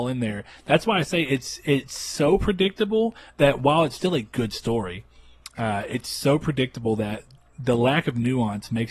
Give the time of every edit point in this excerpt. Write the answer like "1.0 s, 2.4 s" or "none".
none